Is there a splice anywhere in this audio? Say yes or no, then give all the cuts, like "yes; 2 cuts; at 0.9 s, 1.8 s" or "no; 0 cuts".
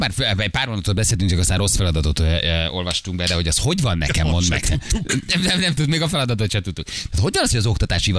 no; 0 cuts